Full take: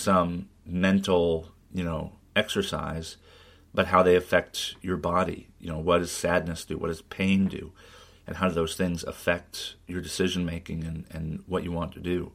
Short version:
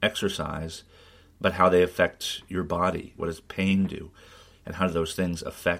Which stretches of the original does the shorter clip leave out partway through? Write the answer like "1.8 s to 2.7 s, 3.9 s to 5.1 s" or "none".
5.5 s to 6.8 s